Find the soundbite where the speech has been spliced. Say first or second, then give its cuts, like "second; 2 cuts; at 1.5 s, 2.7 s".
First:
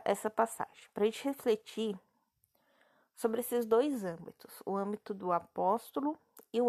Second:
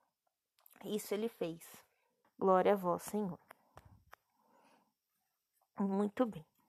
second; 1 cut; at 2.2 s